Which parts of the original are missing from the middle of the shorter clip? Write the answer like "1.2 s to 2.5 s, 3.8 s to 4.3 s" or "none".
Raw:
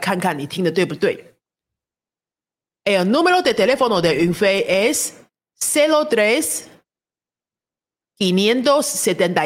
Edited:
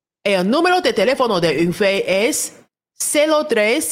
none